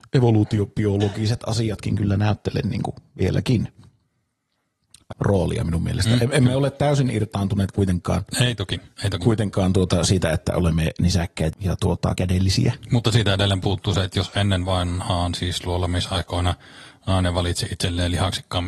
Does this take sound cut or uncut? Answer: cut